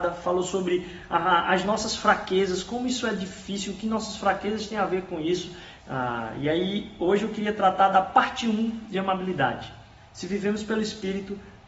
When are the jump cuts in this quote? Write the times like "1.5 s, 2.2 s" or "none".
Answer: 5.8 s, 10.0 s